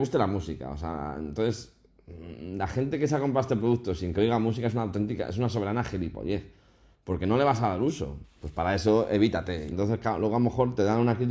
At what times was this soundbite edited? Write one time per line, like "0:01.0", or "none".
0:08.2
0:09.7